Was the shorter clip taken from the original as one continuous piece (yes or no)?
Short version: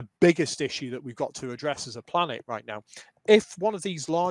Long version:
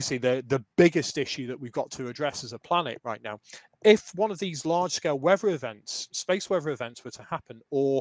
yes